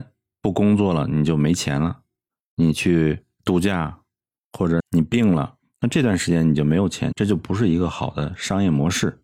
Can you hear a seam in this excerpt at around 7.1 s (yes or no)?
yes